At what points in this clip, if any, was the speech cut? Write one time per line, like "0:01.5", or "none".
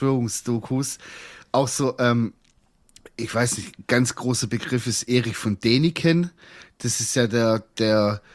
none